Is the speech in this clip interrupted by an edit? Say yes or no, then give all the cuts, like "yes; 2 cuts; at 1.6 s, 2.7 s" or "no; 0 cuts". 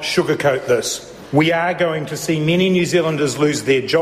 no; 0 cuts